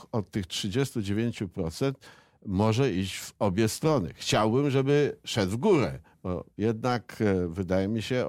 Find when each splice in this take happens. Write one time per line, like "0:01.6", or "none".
none